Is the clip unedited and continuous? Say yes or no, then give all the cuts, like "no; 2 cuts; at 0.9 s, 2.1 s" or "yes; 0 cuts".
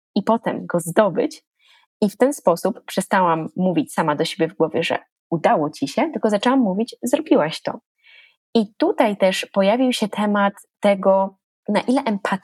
yes; 0 cuts